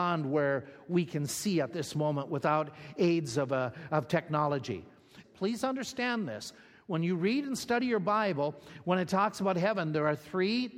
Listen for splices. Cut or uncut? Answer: cut